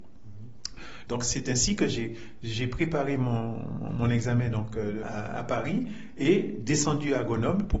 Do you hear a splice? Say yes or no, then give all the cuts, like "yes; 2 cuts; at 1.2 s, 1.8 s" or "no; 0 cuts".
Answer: yes; 2 cuts; at 1.1 s, 5.0 s